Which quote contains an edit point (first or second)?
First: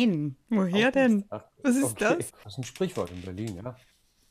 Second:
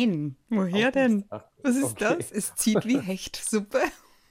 first